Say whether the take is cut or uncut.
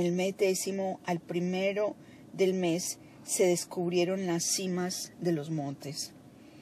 uncut